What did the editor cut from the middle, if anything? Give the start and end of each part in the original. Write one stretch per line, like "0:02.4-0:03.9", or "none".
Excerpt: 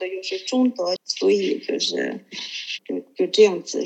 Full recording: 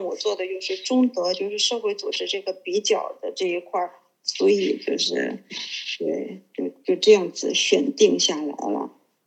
0:01.3-0:04.1
0:06.0-0:06.5